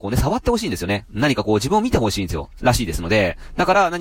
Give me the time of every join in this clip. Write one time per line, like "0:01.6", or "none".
0:02.6